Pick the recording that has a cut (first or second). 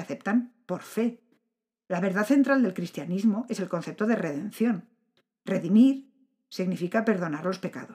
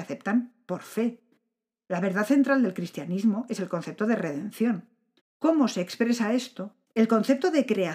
second